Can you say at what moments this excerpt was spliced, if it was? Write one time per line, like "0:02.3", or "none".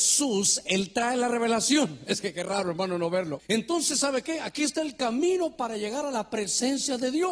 0:03.4